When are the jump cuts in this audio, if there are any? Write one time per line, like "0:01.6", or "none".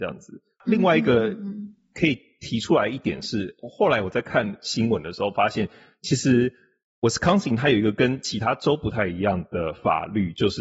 none